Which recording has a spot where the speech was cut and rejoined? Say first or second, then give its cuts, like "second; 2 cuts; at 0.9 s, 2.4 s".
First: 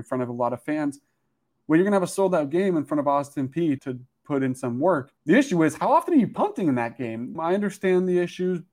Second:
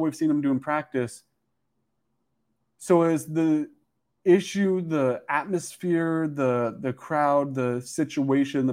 first; 3 cuts; at 3.8 s, 5.2 s, 7.4 s